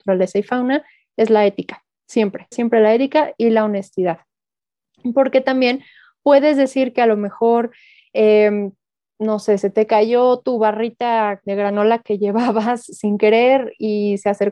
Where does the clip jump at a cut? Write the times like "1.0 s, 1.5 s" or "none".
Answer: 2.5 s